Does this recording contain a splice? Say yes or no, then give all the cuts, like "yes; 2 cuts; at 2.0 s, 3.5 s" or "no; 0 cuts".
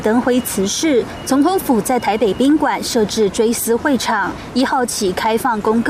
no; 0 cuts